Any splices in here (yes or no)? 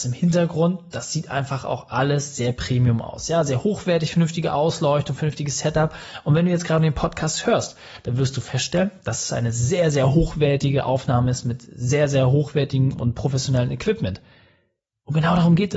no